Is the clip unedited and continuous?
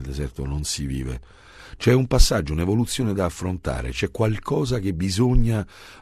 yes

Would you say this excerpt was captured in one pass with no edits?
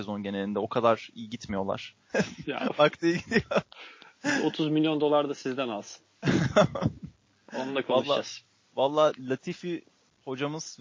no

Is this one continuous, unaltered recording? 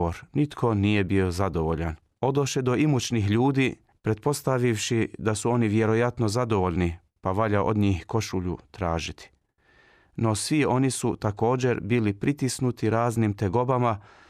yes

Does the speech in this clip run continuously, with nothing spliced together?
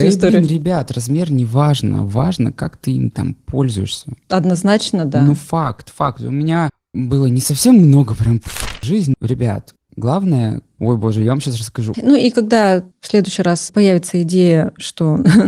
no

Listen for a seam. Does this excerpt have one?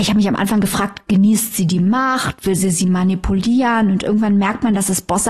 no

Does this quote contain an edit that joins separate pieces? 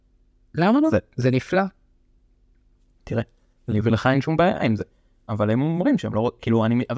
no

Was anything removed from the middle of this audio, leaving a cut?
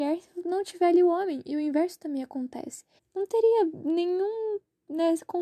yes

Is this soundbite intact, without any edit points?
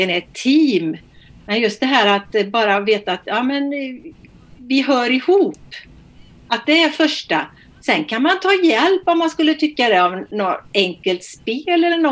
yes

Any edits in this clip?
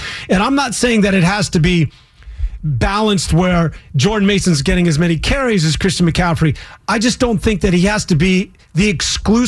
no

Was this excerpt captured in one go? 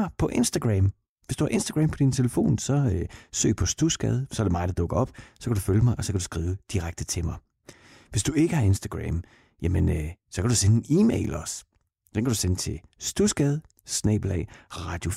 yes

